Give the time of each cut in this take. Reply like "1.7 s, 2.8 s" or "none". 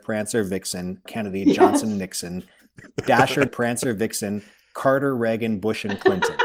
1.1 s, 3.5 s